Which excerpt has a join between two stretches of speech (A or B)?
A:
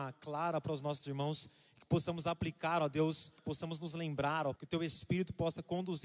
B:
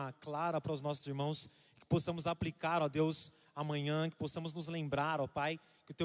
A